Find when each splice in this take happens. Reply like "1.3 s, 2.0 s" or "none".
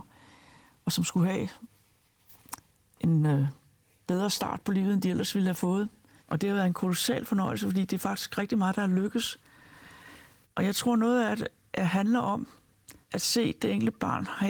6.2 s, 10.4 s, 13.0 s